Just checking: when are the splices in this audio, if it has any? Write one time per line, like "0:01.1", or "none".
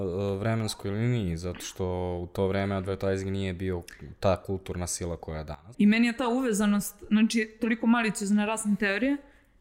0:05.7